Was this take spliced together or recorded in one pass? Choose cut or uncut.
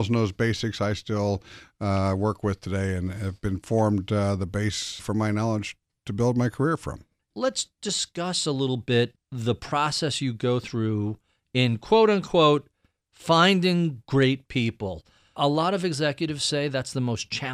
cut